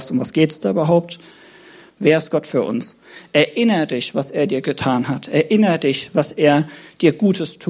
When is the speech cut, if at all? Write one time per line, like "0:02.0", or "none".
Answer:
0:01.9

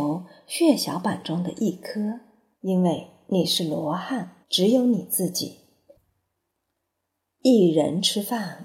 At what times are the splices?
0:02.5
0:04.4

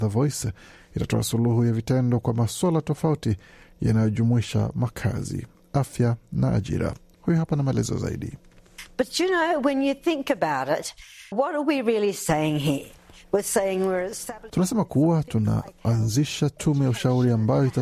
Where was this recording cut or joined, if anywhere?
0:11.3
0:14.5

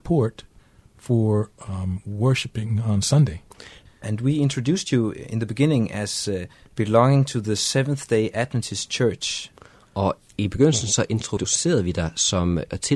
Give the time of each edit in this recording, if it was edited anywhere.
0:03.9

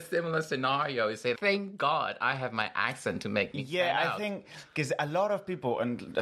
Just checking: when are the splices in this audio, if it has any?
0:01.3

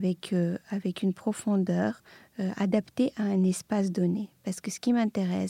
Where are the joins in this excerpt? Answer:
none

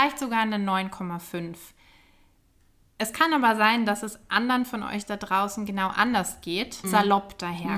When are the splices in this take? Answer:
0:06.8

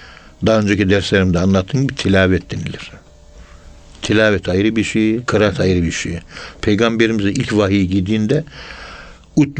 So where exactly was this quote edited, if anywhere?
0:05.3

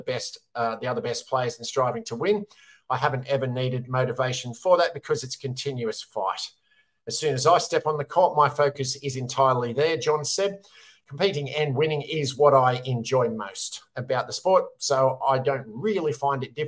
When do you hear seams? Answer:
none

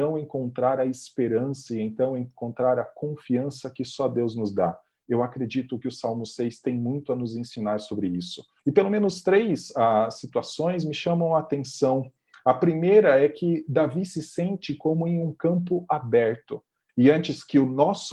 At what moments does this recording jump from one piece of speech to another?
0:08.6
0:16.9

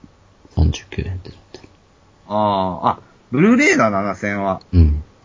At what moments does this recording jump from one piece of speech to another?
none

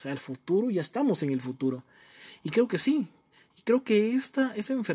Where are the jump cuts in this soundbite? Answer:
none

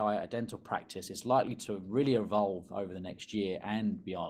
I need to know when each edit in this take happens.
none

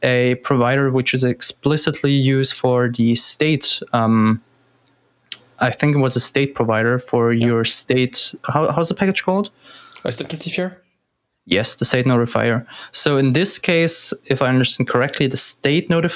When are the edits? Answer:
none

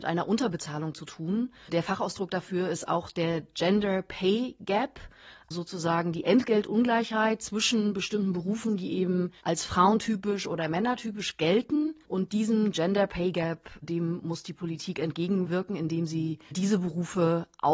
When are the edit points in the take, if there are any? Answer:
0:05.5

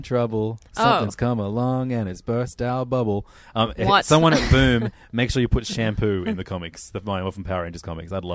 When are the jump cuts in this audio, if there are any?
none

